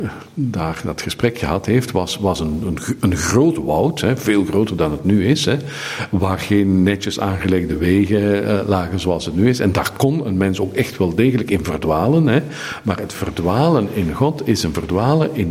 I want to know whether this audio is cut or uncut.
uncut